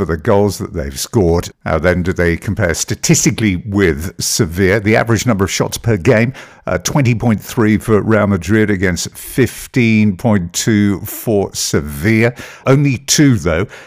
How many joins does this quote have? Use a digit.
2